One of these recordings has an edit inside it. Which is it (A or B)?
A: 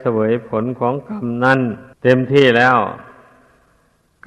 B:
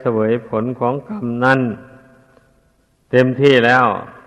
A